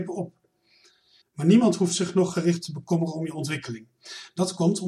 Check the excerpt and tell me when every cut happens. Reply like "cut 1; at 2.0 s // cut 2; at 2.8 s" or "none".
cut 1; at 1.2 s